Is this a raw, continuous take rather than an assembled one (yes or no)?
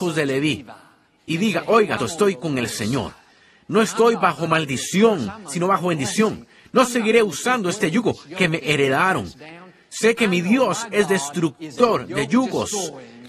no